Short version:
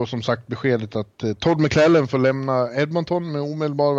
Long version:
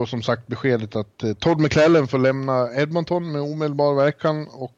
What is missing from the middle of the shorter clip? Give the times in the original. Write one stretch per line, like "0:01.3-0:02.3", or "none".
none

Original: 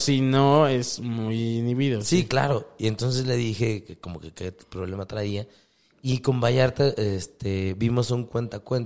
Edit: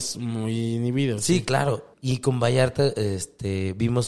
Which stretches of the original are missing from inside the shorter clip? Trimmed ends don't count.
0:02.8-0:05.9

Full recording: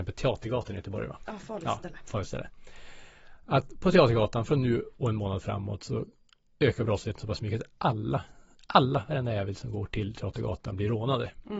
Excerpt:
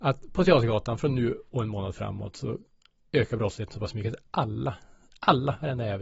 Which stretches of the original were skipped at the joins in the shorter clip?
none

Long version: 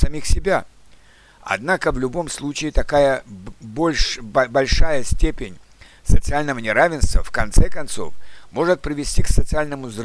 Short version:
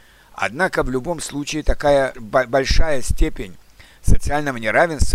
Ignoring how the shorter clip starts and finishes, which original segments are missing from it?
0:03.2-0:04.2

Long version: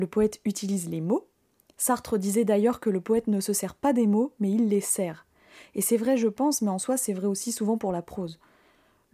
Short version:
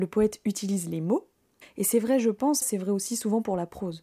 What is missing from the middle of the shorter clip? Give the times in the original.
0:01.6-0:05.6
0:06.6-0:07.0

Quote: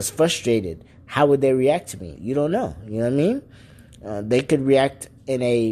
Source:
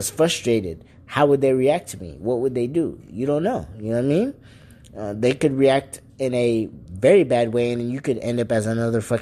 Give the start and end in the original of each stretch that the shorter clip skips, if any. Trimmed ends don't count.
0:02.2-0:03.1

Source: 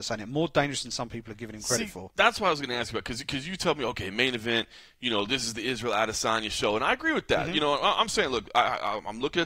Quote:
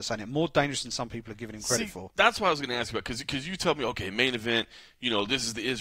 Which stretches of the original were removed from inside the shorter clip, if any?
none

